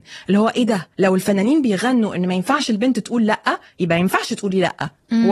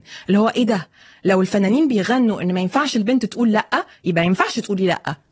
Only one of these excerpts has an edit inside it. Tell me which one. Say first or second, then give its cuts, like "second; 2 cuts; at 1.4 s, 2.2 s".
first; 1 cut; at 0.9 s